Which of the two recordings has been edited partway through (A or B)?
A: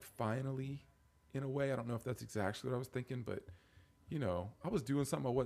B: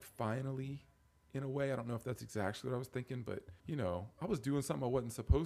B